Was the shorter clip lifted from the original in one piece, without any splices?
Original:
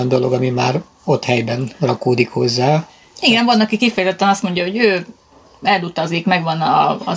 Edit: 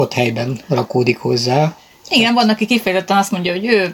yes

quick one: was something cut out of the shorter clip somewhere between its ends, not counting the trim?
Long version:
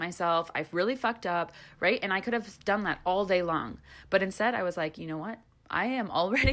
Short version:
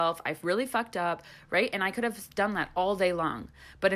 no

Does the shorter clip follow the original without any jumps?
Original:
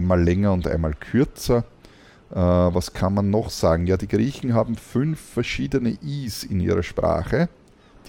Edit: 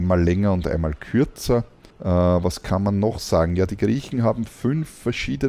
no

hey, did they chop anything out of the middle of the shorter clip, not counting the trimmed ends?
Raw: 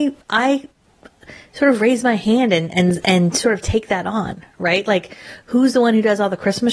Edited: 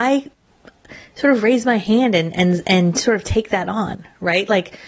no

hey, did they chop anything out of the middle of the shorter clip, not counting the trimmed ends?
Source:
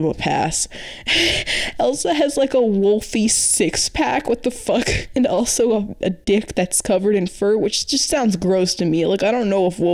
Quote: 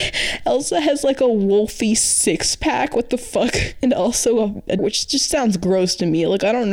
yes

